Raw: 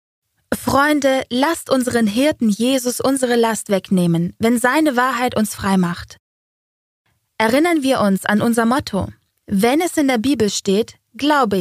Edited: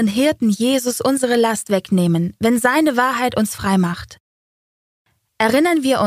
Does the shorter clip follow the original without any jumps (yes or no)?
yes